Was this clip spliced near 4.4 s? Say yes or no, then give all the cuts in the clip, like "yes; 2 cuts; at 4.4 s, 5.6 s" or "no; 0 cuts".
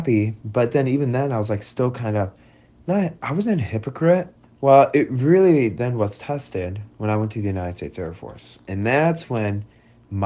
yes; 1 cut; at 4.4 s